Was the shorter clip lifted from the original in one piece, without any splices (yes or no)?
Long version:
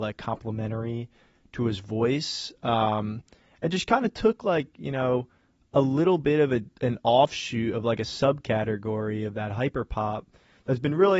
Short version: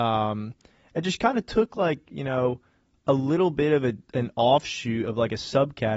yes